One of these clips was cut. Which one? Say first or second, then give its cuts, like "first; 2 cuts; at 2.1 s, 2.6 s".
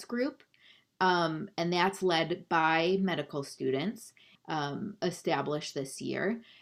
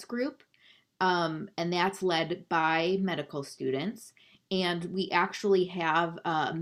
first; 1 cut; at 4.3 s